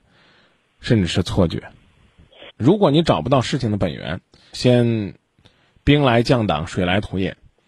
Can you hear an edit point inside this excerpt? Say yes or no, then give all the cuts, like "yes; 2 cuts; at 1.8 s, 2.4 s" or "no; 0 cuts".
yes; 2 cuts; at 2.5 s, 4.5 s